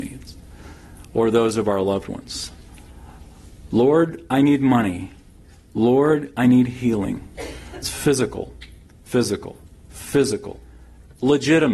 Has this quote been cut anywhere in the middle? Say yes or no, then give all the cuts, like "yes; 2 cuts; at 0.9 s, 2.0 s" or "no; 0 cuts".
yes; 1 cut; at 7.8 s